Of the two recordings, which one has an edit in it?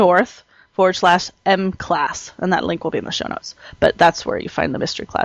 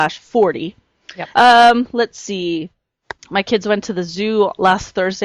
second; 2 cuts; at 1.3 s, 3.2 s

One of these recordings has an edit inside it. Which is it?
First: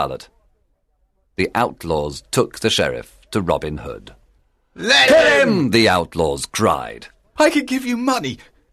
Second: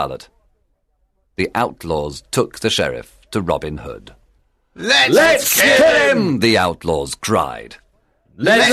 first; 2 cuts; at 5.1 s, 7.4 s

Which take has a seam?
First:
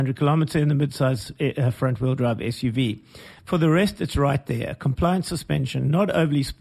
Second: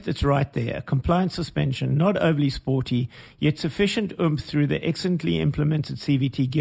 first; 1 cut; at 3.4 s

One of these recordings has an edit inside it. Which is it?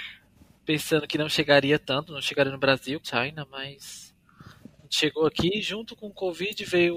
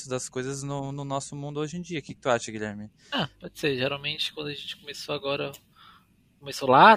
first; 1 cut; at 3.0 s

